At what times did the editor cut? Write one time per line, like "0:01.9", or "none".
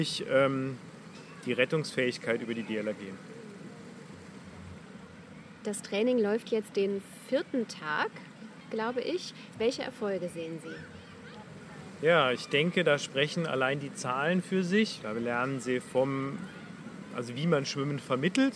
0:09.5
0:15.0